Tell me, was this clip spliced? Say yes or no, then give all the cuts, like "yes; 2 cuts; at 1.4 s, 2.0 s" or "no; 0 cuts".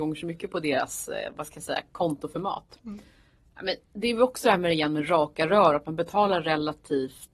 no; 0 cuts